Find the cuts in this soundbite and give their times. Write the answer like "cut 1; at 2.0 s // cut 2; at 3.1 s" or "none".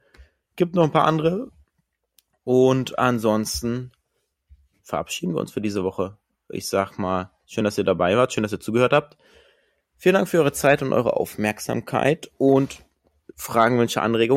none